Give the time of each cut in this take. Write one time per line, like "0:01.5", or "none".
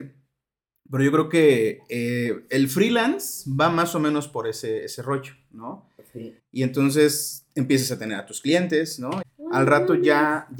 0:06.4
0:09.2

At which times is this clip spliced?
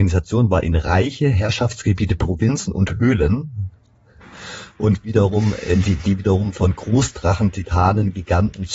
none

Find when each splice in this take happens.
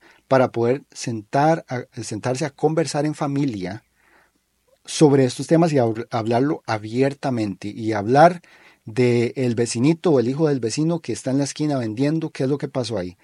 none

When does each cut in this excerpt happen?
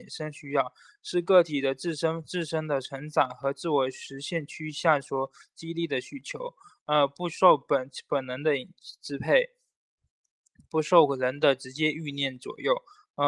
none

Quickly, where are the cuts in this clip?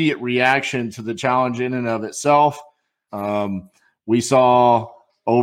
0:03.1

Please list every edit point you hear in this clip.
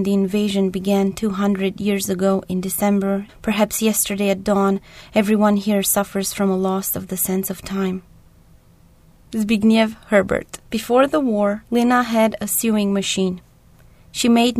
0:03.3
0:10.6
0:11.7

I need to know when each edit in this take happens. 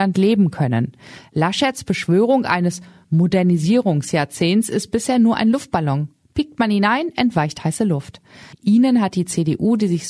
0:08.5

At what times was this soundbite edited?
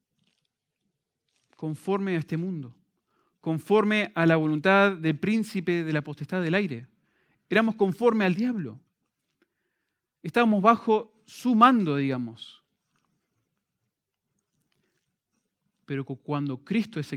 none

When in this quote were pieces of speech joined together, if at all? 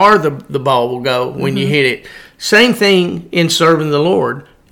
none

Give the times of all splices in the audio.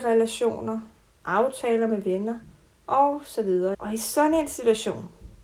0:03.7

